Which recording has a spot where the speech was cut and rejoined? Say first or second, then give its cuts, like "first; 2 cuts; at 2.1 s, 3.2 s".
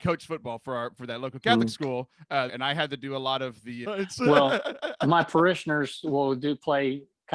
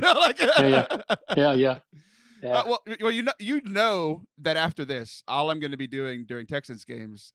first; 2 cuts; at 2.5 s, 3.8 s